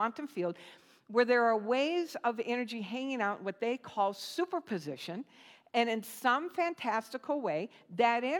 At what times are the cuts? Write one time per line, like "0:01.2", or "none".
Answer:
none